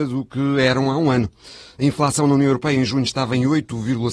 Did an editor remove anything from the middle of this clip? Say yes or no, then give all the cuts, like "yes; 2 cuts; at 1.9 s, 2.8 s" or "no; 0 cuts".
no; 0 cuts